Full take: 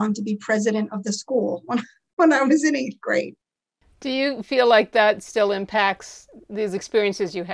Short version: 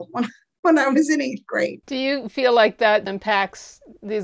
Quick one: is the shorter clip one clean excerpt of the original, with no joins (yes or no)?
no